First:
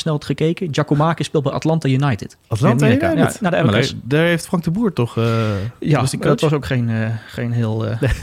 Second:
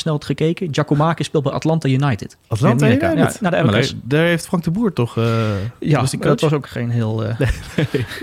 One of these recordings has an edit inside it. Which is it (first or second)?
second